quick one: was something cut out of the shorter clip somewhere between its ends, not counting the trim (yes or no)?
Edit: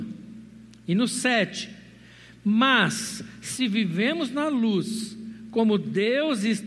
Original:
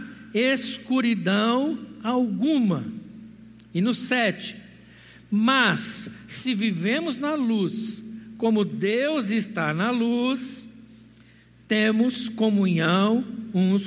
no